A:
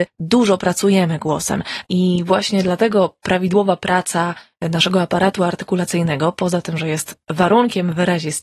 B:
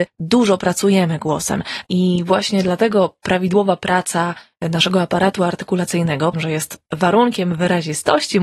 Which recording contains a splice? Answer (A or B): B